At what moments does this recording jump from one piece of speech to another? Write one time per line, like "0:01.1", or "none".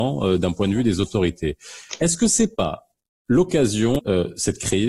0:04.0